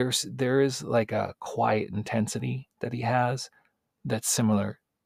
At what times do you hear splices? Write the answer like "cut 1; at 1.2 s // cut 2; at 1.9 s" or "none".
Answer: none